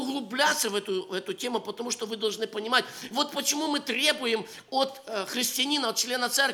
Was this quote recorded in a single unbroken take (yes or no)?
yes